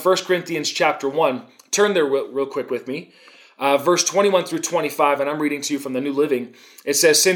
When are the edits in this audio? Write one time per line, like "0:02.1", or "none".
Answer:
none